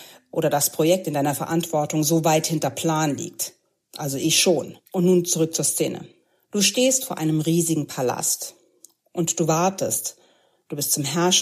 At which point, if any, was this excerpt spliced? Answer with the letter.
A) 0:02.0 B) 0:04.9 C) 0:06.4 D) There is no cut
B